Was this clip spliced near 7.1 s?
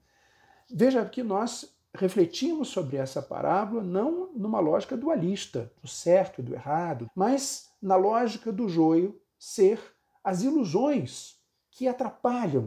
yes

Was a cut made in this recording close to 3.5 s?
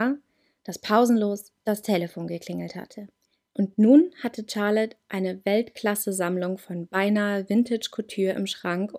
yes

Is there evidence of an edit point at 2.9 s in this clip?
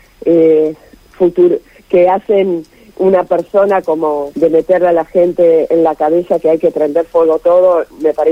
yes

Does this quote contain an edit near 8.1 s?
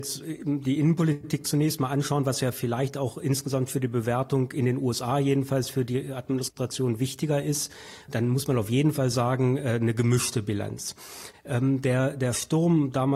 yes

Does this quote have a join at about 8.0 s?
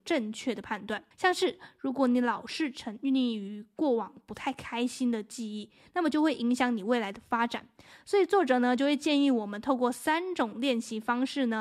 no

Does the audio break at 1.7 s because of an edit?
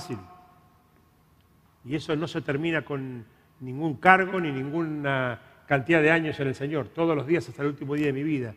yes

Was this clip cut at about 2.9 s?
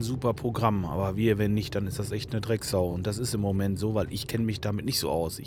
no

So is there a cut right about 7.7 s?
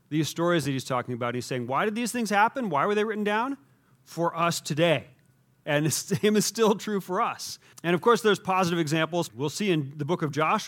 yes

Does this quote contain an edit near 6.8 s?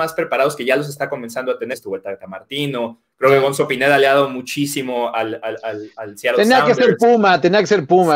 no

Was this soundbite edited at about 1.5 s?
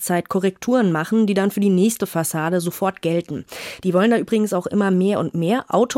no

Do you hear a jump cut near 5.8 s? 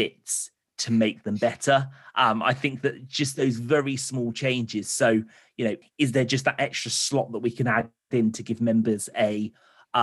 yes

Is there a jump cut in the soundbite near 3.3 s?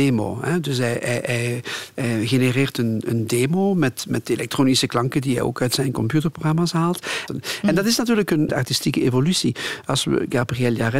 no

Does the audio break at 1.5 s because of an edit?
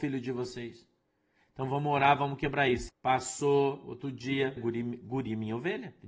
no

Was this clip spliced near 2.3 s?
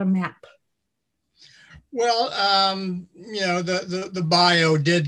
no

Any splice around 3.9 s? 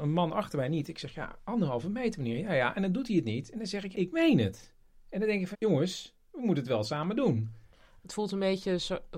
yes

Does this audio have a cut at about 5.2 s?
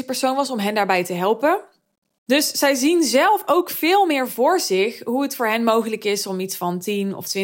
no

